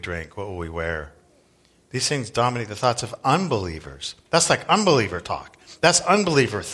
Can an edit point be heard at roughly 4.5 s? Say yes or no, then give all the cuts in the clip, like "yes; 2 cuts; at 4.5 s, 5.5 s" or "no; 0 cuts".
no; 0 cuts